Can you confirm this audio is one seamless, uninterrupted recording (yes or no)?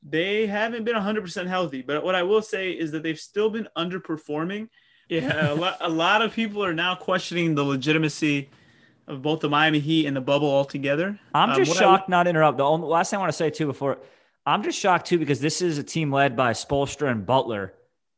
no